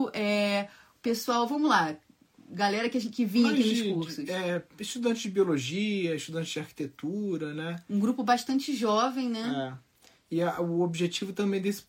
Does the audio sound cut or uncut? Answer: uncut